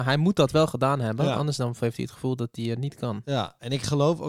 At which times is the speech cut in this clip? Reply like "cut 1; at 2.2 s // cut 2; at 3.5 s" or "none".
none

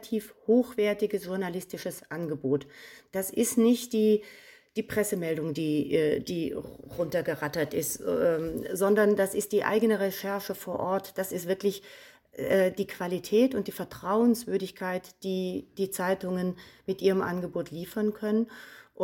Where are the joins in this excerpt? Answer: none

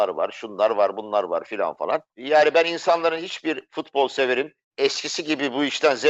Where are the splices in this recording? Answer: cut 1; at 2.1 s

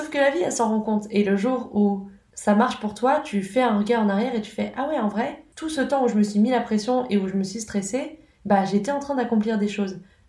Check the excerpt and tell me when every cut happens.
none

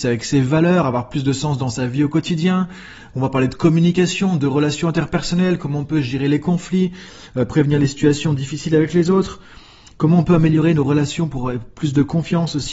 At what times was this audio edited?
cut 1; at 5.6 s

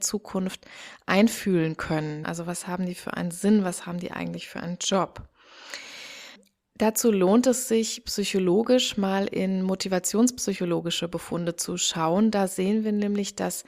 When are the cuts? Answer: cut 1; at 2.2 s

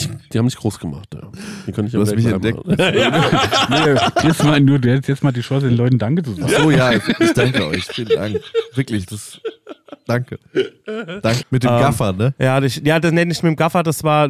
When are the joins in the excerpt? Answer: cut 1; at 11.4 s

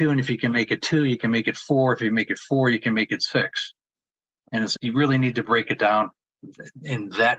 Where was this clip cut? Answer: cut 1; at 4.8 s

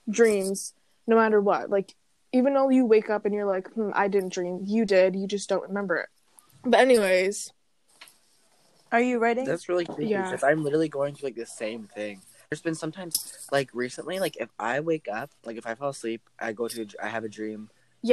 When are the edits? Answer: cut 1; at 15.4 s

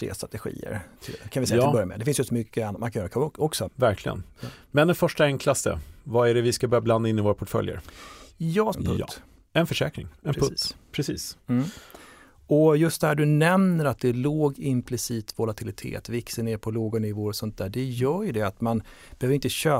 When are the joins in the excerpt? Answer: cut 1; at 3.7 s // cut 2; at 8.7 s

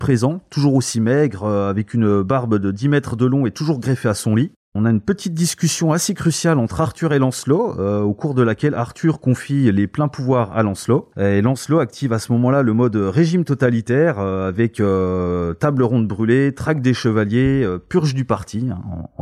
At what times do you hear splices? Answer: none

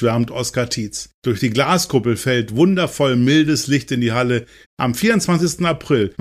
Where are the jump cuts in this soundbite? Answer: cut 1; at 1.2 s // cut 2; at 4.6 s

